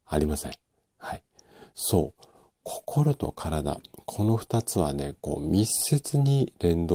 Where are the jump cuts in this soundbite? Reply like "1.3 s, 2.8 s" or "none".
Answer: none